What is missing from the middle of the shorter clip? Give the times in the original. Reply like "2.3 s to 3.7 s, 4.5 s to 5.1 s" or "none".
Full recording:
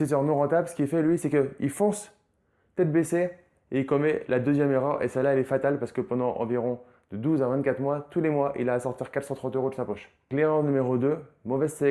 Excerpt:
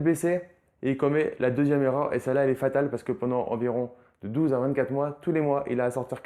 none